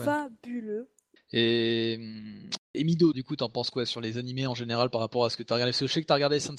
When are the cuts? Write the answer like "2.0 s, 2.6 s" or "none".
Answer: 1.2 s, 3.1 s

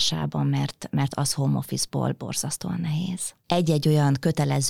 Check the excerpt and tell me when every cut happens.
3.4 s

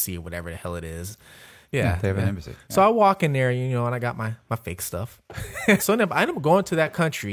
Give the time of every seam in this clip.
1.6 s, 5.8 s

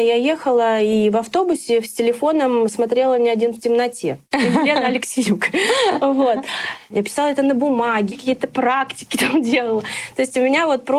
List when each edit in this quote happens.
6.9 s, 8.1 s

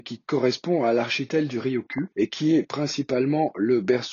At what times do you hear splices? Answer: 2.1 s

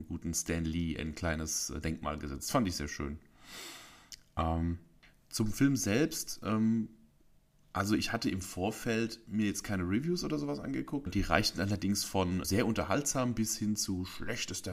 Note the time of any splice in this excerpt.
11.1 s, 12.4 s

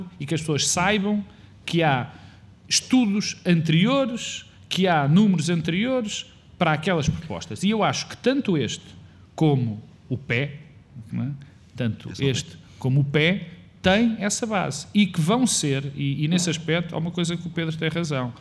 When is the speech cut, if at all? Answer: 11.1 s

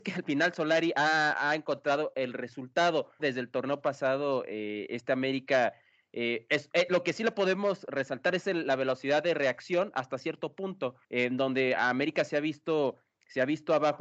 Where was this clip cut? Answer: 3.2 s, 11.0 s

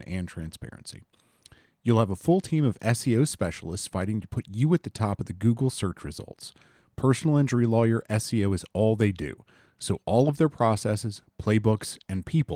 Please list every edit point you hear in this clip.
none

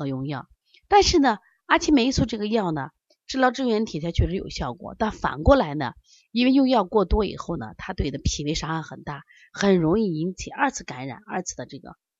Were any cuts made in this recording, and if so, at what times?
none

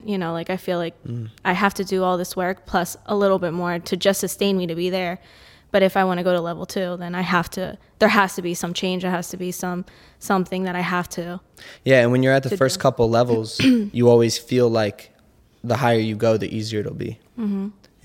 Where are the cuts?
none

